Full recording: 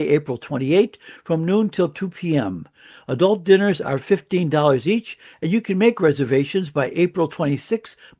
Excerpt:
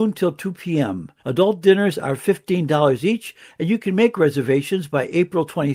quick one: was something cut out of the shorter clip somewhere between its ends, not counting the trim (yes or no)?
yes